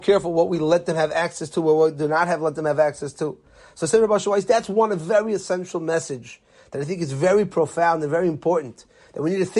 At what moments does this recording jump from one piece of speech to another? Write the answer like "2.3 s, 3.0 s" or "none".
none